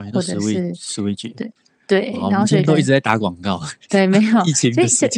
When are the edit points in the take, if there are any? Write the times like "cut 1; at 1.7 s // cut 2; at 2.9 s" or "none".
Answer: none